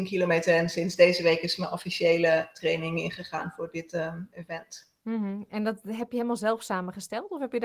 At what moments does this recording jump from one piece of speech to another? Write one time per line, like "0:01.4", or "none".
none